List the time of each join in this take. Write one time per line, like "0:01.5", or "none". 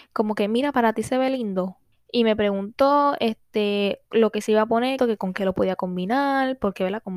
0:01.9
0:05.0